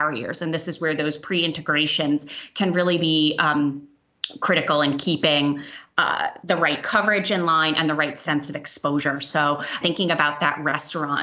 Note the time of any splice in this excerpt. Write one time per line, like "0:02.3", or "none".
0:09.8